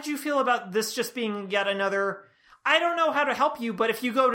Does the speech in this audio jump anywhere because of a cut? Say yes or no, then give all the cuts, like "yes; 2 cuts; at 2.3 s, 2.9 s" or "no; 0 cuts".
no; 0 cuts